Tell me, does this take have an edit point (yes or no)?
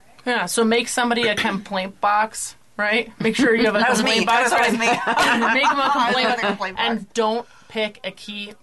no